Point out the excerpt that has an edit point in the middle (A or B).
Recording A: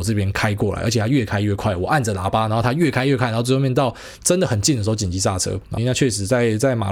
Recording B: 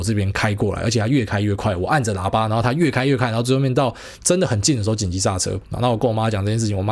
A